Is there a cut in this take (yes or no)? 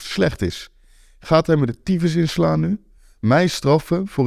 no